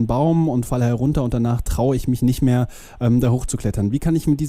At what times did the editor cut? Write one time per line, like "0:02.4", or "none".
none